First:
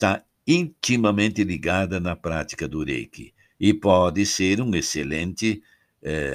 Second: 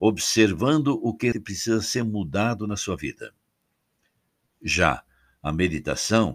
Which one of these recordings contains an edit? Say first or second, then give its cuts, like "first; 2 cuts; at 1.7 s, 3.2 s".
second; 1 cut; at 1.3 s